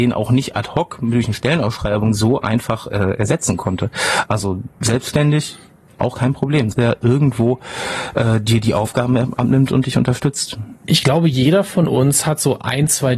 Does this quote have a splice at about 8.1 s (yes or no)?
no